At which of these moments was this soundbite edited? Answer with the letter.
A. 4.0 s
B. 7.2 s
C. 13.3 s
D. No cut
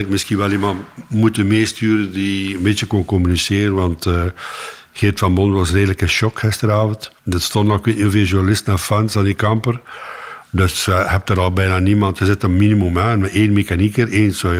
B